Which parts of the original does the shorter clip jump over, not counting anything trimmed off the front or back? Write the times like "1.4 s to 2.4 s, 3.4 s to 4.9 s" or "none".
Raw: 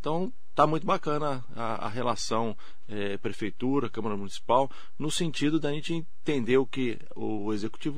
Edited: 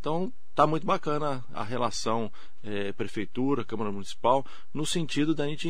1.5 s to 1.8 s